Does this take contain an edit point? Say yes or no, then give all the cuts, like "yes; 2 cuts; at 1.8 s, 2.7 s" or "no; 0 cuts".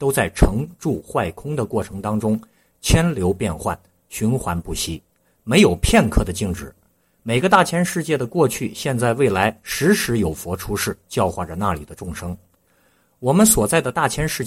no; 0 cuts